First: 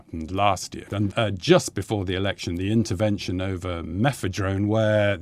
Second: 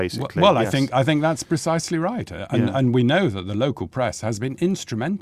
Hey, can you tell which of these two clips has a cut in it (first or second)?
first